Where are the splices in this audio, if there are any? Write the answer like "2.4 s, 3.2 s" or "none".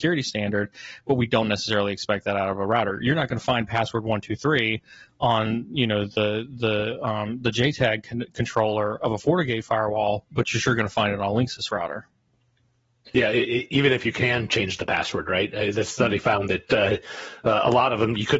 none